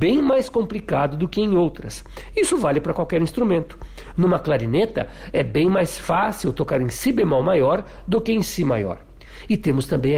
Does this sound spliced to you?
yes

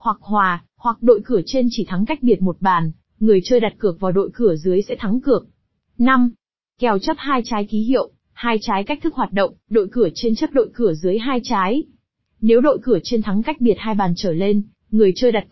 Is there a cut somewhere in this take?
no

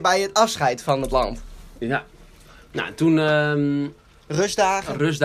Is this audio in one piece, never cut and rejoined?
yes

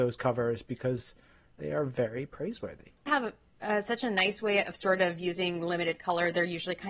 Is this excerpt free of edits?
no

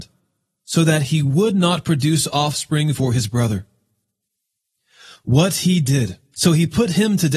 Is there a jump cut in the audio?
yes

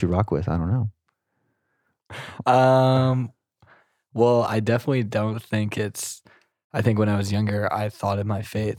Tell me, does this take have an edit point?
no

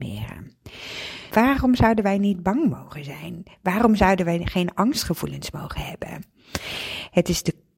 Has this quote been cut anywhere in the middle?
yes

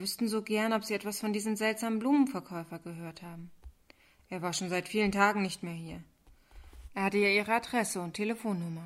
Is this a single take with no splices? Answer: no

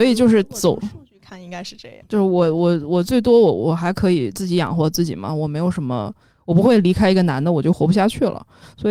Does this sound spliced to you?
yes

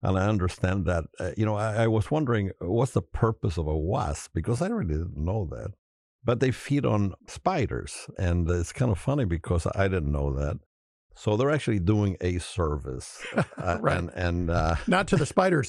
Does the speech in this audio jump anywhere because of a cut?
no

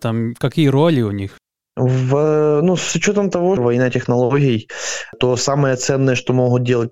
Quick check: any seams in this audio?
yes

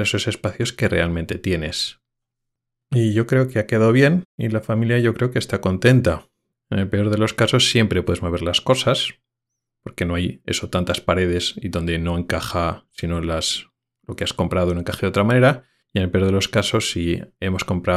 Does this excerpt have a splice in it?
yes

